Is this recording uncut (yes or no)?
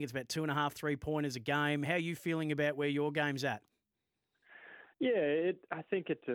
yes